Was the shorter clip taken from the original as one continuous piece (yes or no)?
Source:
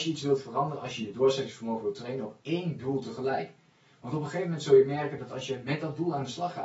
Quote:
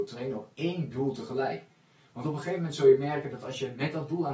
yes